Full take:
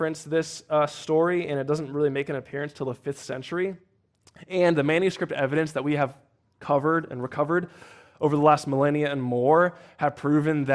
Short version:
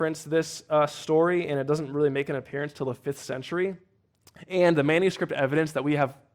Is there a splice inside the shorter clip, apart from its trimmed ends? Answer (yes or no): no